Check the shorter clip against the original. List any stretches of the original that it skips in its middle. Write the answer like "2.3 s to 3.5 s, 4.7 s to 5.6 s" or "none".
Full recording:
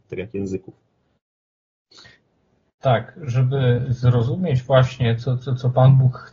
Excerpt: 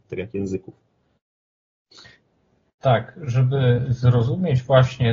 none